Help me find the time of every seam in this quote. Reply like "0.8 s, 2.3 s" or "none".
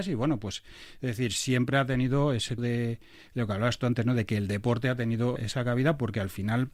2.6 s, 5.4 s